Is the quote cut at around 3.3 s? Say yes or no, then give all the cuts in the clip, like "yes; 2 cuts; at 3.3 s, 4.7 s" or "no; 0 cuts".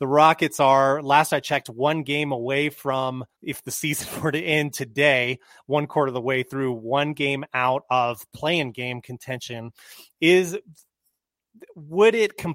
yes; 1 cut; at 3.3 s